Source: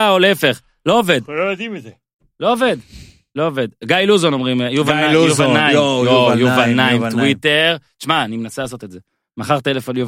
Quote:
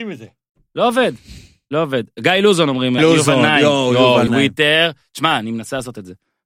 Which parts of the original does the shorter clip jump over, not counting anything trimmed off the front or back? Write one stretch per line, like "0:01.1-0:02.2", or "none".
0:04.6-0:05.1
0:06.4-0:07.1